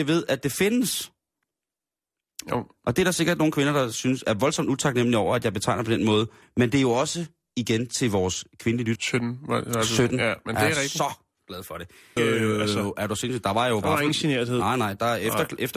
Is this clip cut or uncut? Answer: cut